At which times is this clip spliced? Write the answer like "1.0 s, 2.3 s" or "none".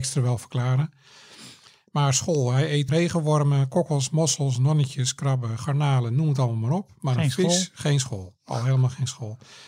2.9 s

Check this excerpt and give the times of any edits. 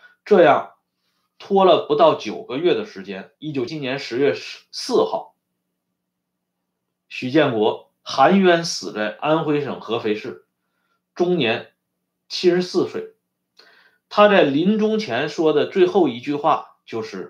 3.7 s

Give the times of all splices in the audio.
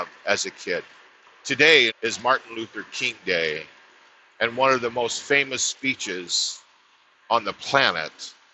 1.9 s

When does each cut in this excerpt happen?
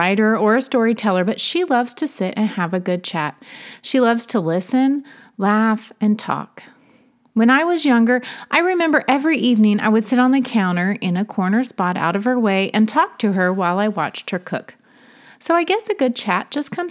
none

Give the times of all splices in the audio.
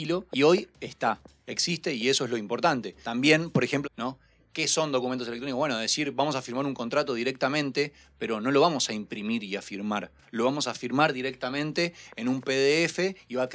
3.8 s

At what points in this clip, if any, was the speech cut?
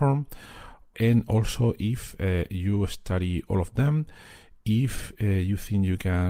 0.9 s

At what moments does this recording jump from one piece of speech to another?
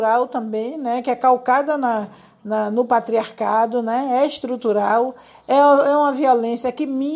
none

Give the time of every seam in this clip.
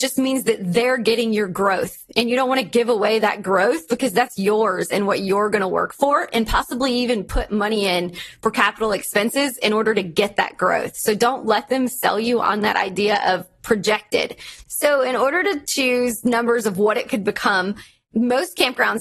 14.6 s

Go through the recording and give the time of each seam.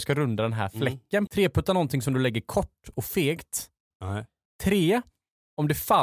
1.3 s, 3.9 s

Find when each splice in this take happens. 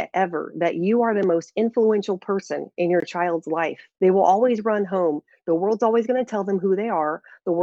3.9 s

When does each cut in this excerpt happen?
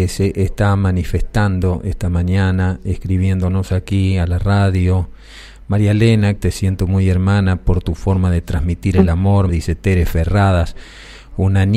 6.4 s, 9.5 s

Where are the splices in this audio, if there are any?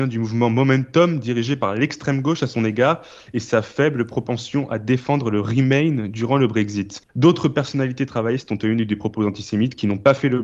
7.1 s

